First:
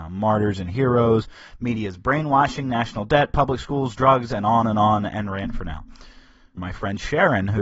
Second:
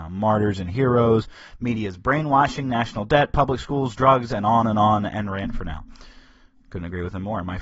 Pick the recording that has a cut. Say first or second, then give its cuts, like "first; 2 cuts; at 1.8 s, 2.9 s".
first; 1 cut; at 6.6 s